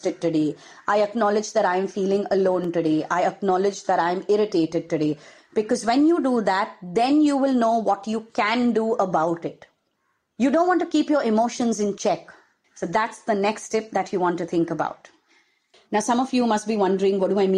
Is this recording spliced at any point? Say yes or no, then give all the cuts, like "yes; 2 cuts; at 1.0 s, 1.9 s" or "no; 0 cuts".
yes; 3 cuts; at 5.4 s, 12.6 s, 15.7 s